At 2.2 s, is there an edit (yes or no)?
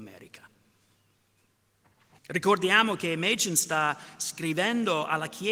yes